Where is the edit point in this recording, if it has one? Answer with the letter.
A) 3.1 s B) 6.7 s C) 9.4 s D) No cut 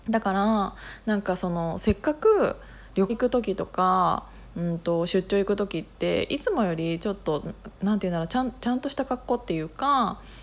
A